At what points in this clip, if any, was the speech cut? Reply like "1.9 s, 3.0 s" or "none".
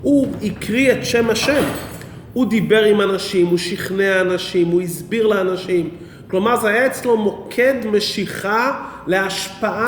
none